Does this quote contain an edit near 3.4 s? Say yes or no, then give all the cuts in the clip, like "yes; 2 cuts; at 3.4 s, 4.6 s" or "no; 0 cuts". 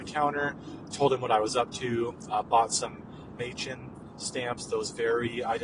yes; 1 cut; at 3.4 s